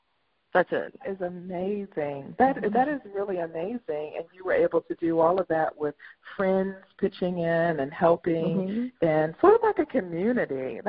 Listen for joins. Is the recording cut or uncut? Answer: cut